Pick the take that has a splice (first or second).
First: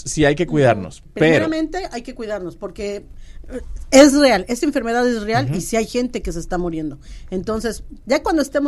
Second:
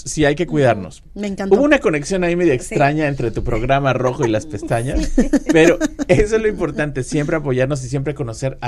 second